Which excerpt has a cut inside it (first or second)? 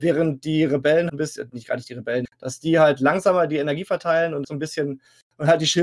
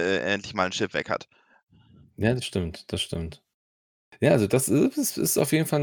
first